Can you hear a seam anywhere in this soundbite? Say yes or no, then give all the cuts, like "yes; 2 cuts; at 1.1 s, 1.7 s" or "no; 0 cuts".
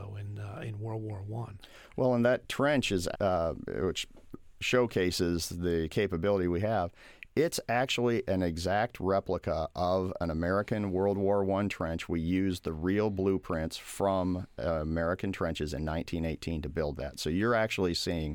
yes; 1 cut; at 3.1 s